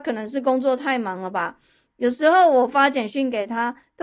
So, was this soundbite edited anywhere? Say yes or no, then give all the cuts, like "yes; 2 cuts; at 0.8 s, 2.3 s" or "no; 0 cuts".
no; 0 cuts